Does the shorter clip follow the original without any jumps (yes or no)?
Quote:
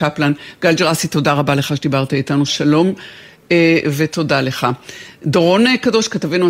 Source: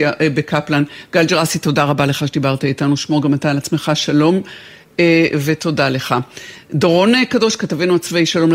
no